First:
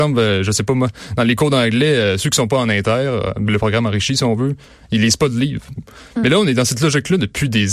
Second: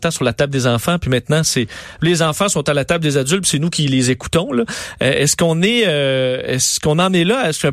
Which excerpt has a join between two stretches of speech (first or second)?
first